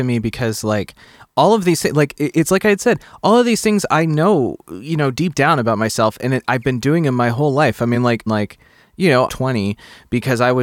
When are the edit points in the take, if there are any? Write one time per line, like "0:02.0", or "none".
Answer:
0:08.3
0:09.3